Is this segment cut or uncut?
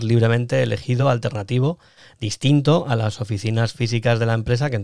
uncut